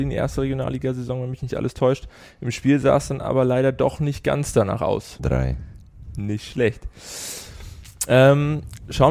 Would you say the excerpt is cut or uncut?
cut